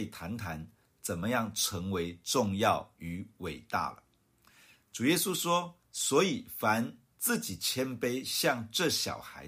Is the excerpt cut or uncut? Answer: uncut